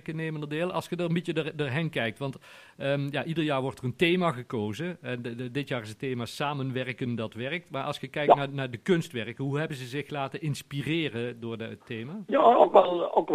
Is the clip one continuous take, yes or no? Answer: yes